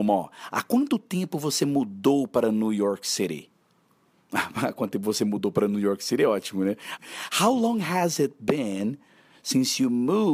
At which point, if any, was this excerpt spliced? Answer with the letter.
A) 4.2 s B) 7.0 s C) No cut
B